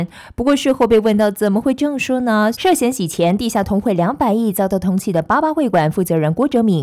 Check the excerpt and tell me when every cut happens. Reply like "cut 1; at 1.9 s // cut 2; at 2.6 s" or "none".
cut 1; at 2.5 s